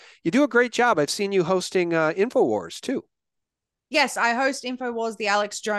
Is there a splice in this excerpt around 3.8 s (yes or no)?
no